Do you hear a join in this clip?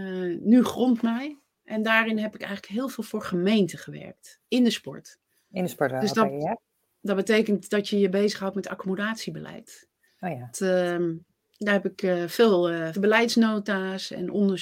yes; 2 cuts; at 10.5 s, 12.9 s

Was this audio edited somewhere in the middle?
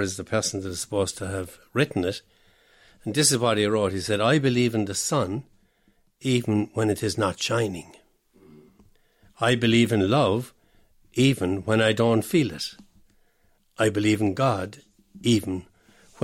no; 0 cuts

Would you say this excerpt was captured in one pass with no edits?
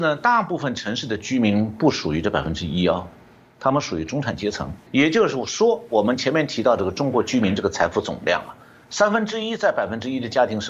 no; 1 cut; at 4.9 s

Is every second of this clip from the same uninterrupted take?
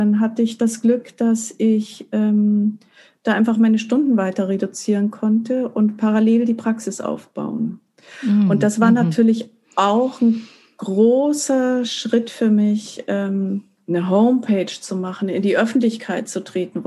yes; 0 cuts

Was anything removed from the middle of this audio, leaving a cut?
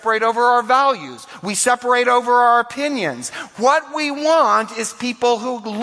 no; 0 cuts

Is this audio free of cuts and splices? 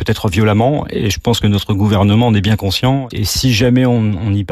no; 1 cut; at 3.1 s

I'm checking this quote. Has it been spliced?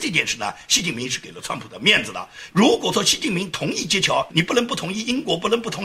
yes; 2 cuts; at 2.5 s, 4.3 s

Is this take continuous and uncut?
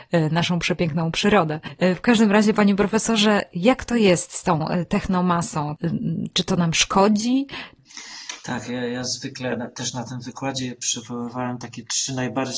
yes; 0 cuts

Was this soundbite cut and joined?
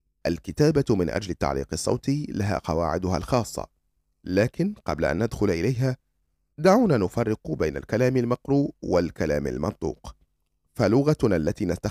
no; 0 cuts

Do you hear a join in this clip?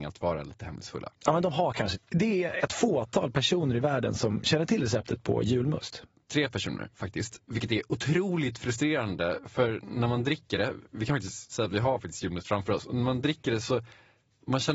yes; 1 cut; at 1.9 s

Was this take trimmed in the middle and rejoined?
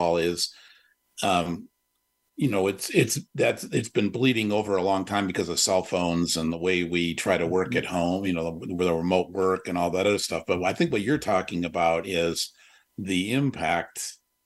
no; 0 cuts

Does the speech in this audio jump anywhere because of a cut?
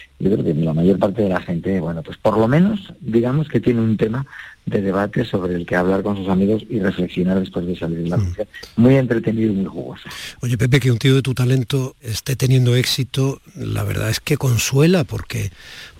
no; 0 cuts

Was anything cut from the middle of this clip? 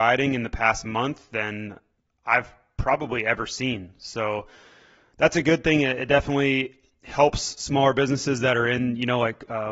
no; 0 cuts

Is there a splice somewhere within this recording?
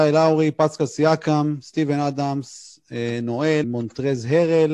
yes; 1 cut; at 3.6 s

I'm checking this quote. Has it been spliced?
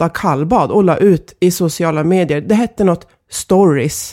no; 0 cuts

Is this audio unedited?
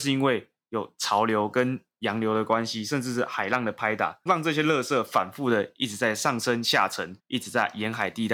no; 2 cuts; at 4.3 s, 7.2 s

